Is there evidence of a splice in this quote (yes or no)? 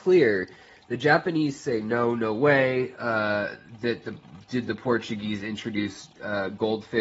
no